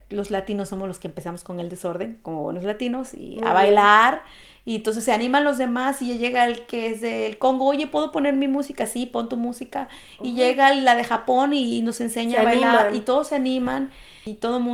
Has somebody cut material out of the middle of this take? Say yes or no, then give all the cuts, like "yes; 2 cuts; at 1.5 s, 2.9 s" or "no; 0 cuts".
no; 0 cuts